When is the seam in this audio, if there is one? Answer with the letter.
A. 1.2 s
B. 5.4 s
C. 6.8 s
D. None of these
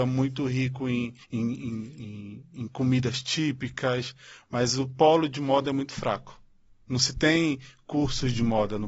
A